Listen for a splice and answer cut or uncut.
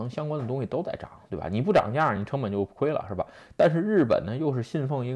uncut